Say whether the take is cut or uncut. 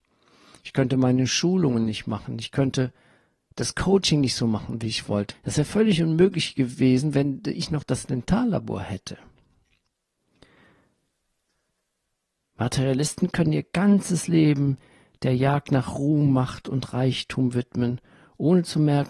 cut